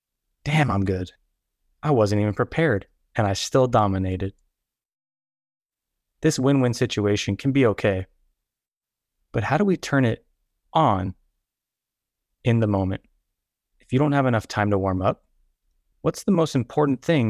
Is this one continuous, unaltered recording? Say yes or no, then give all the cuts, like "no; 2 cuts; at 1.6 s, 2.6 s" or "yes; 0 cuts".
no; 2 cuts; at 13.6 s, 15.9 s